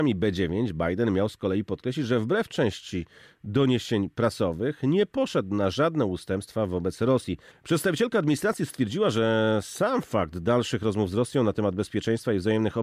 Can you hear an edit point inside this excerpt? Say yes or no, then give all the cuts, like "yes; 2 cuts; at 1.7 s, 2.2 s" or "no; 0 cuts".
yes; 1 cut; at 7.5 s